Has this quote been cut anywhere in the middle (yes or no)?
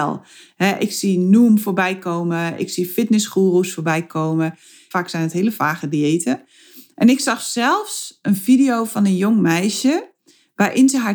yes